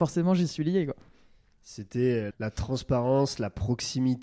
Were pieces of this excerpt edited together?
yes; 1 cut; at 2.3 s

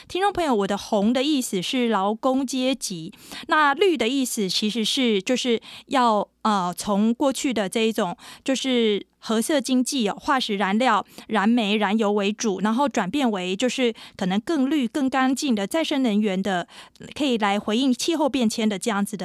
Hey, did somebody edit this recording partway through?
no; 0 cuts

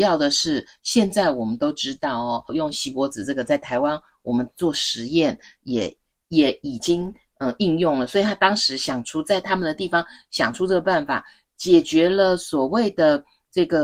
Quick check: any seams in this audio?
yes; 1 cut; at 2.5 s

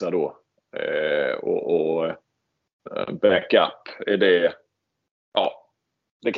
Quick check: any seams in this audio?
no; 0 cuts

